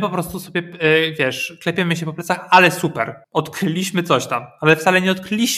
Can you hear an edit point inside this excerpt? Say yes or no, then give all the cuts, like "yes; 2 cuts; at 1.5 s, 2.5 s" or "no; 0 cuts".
yes; 1 cut; at 3.2 s